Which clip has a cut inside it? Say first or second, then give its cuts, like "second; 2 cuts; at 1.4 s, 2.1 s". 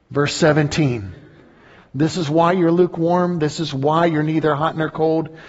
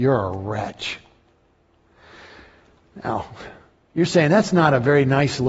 first; 1 cut; at 1.8 s